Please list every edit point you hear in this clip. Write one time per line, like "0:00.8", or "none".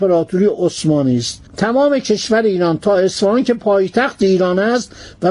0:01.5